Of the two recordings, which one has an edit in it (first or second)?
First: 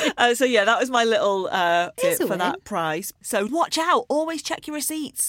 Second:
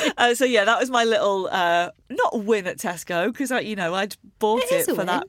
first